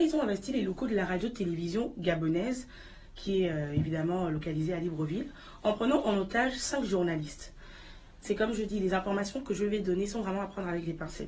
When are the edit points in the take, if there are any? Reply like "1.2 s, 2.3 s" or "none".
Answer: 8.2 s